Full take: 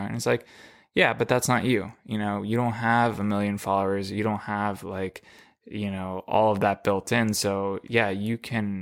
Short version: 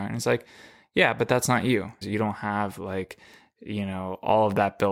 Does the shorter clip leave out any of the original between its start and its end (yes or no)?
yes